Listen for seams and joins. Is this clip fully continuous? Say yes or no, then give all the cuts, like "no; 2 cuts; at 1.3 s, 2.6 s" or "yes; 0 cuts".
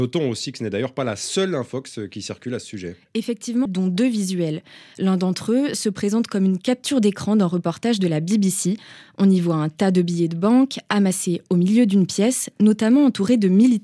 no; 1 cut; at 3.7 s